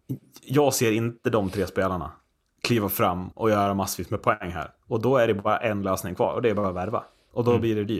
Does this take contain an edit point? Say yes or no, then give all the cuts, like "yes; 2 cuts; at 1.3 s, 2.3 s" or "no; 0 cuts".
no; 0 cuts